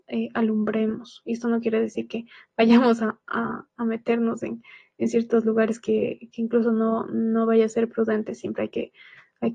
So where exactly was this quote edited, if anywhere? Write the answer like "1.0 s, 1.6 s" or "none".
none